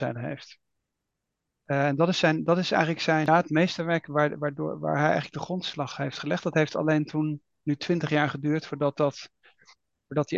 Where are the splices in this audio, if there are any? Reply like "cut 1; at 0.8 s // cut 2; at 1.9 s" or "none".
cut 1; at 3.3 s